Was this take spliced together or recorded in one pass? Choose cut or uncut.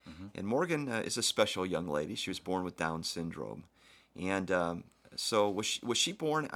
uncut